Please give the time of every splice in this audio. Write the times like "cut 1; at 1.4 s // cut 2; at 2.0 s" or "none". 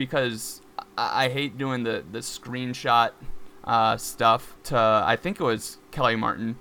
cut 1; at 4.6 s